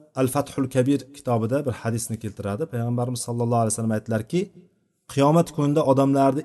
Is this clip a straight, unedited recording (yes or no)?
yes